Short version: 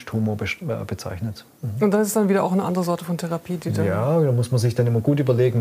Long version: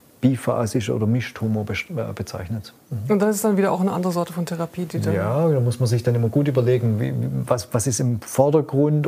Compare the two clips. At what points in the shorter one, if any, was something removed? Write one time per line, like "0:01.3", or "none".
none